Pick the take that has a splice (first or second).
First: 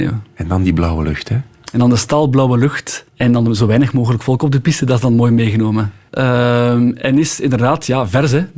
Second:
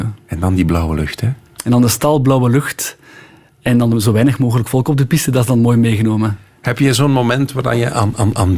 first